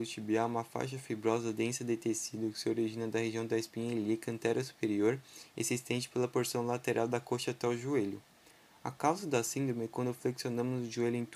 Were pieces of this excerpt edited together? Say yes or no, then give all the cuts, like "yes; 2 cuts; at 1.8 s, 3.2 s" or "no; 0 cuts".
no; 0 cuts